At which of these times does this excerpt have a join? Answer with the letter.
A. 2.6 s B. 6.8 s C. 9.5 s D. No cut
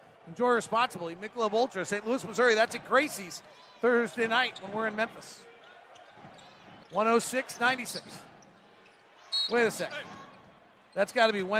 B